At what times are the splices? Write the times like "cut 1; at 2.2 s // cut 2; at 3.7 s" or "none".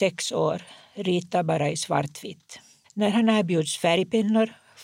cut 1; at 2.8 s